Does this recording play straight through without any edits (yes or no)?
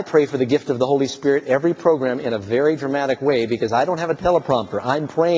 yes